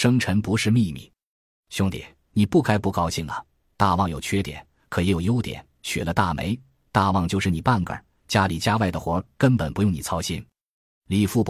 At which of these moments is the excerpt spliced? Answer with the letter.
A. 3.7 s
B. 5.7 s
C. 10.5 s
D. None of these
C